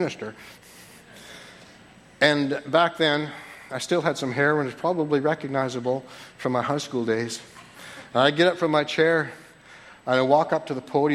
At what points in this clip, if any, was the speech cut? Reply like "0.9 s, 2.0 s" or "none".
none